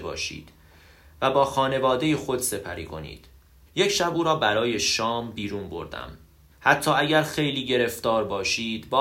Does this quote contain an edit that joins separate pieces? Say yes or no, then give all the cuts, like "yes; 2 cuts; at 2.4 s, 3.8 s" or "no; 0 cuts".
yes; 2 cuts; at 3.7 s, 6.5 s